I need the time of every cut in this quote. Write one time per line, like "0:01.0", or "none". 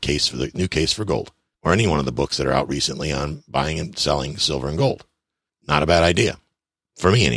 none